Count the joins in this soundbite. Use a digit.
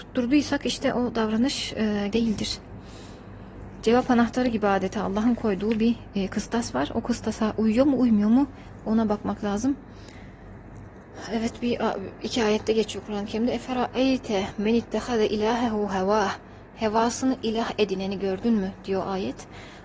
1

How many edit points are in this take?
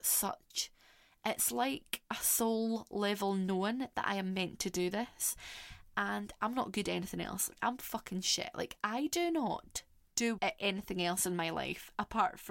2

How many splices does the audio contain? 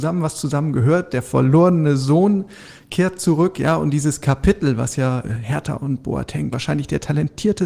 2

